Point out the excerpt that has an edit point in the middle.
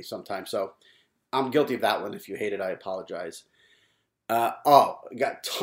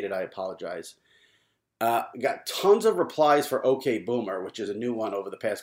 second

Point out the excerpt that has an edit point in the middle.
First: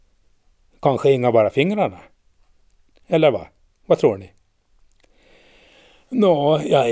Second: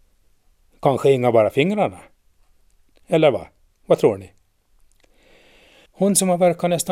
second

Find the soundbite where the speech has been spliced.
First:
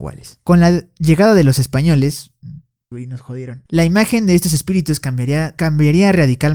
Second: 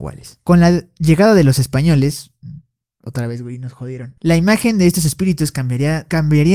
first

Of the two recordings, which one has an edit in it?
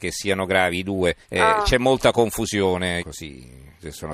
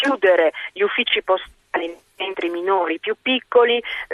first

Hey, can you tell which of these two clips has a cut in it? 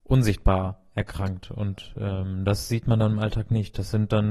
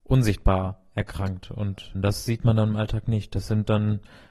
second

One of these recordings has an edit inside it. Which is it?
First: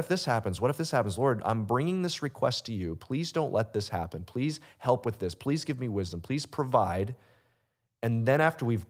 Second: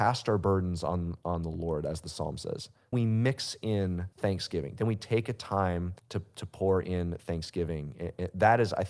second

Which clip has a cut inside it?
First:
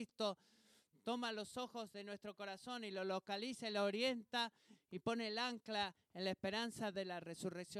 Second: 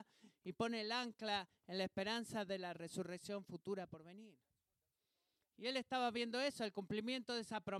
second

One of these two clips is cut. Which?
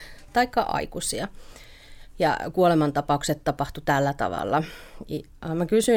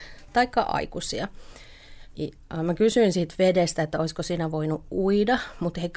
second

